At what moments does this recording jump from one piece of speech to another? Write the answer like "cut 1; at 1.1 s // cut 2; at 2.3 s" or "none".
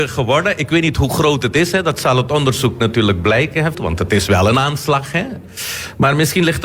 cut 1; at 3.7 s

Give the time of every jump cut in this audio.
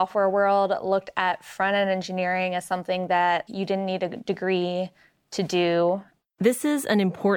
cut 1; at 3.5 s

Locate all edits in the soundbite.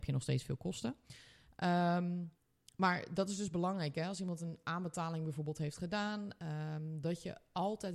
none

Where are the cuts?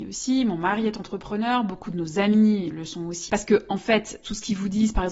cut 1; at 3.3 s

